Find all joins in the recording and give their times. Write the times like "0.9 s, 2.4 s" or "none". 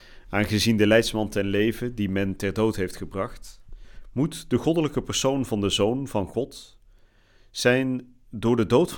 4.0 s